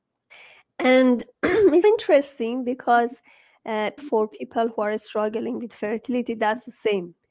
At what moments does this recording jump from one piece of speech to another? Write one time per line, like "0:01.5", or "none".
0:01.8
0:04.0